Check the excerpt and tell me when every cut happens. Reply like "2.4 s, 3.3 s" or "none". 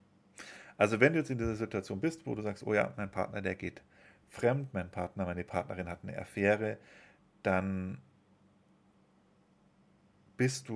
none